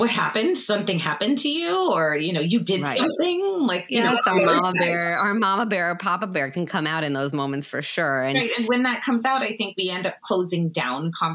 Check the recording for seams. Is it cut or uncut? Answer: uncut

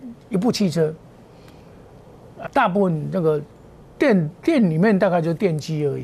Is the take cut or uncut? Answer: cut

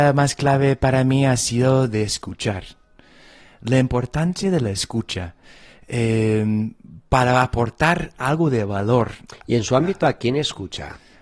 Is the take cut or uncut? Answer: uncut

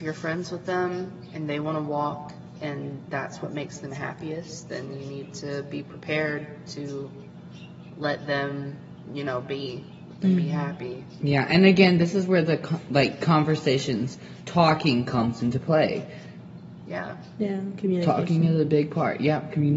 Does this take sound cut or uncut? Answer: uncut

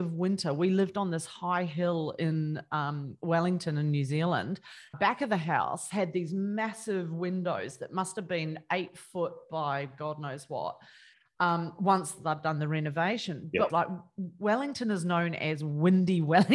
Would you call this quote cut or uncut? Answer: cut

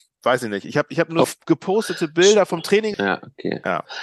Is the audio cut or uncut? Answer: cut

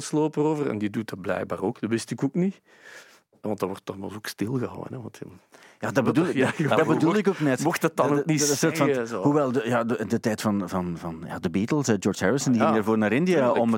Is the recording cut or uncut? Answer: uncut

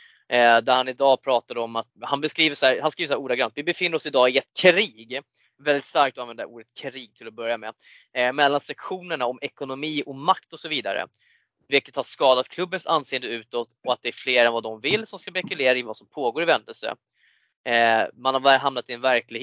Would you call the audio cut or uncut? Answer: cut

